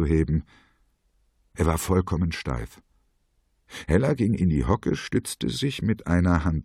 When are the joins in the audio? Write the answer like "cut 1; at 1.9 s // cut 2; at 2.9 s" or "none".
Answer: cut 1; at 3.8 s